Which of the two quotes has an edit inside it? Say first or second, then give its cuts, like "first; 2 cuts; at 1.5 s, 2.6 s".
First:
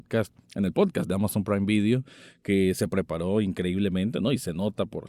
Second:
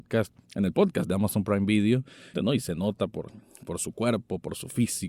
second; 1 cut; at 2.3 s